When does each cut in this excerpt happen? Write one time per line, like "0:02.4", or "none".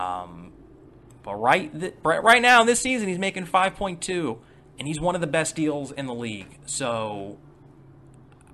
none